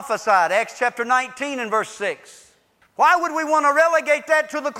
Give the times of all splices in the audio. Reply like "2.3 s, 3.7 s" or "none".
2.8 s